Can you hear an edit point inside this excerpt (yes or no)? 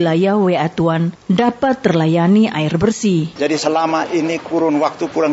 yes